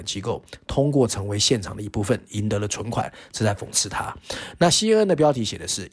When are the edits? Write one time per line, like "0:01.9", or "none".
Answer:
0:03.3